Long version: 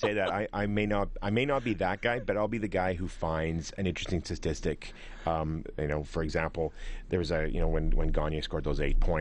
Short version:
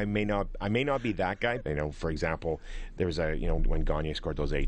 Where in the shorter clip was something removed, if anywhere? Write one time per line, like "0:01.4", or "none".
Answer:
0:01.6
0:03.6